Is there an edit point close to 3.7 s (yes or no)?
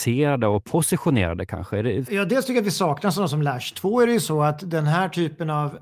no